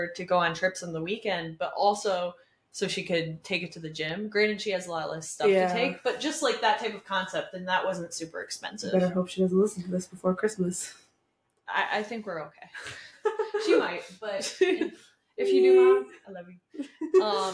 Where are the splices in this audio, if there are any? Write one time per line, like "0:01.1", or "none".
none